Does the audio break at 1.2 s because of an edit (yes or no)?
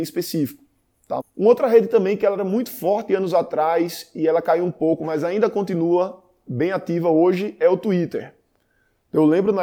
yes